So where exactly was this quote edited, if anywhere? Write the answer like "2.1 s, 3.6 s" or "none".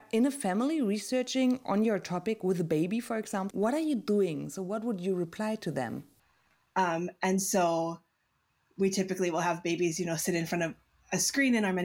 3.5 s, 6.6 s